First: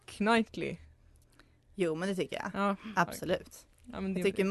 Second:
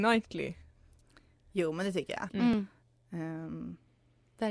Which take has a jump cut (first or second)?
second